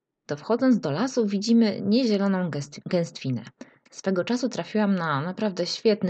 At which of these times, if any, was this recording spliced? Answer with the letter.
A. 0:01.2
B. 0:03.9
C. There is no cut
B